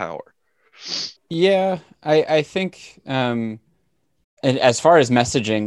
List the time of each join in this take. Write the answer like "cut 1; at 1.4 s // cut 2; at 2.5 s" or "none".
cut 1; at 1.2 s